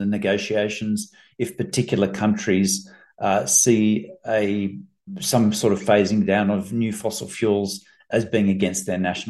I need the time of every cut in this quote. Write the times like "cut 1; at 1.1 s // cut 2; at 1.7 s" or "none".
none